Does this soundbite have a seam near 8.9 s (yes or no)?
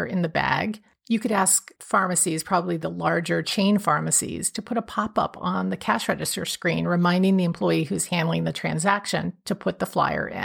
no